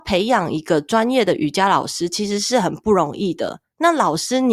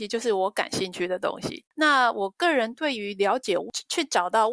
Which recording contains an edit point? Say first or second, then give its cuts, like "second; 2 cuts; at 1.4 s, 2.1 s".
second; 1 cut; at 1.7 s